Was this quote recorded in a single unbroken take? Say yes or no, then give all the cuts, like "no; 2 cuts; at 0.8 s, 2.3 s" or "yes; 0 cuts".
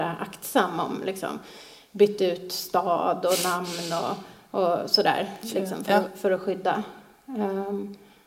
yes; 0 cuts